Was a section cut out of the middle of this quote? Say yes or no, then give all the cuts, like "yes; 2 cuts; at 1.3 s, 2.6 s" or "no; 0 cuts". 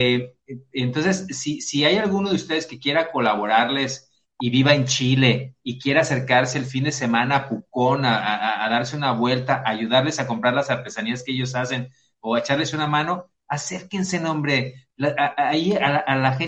no; 0 cuts